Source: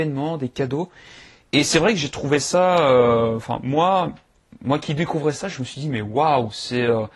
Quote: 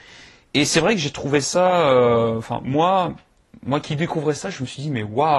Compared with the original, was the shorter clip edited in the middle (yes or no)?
no